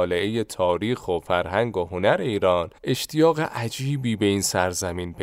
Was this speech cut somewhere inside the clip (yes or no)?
yes